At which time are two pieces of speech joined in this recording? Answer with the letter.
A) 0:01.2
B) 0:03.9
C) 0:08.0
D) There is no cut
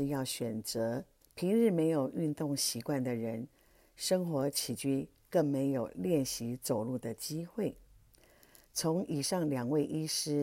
A